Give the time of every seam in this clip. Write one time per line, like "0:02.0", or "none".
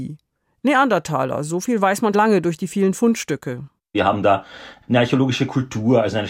0:02.1